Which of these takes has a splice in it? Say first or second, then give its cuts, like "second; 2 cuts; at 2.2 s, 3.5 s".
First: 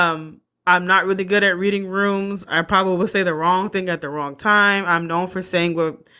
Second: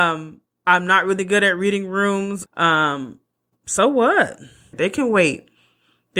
second; 2 cuts; at 2.5 s, 4.7 s